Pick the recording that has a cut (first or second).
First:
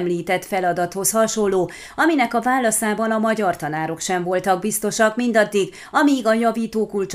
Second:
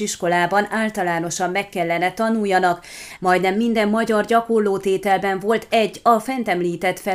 second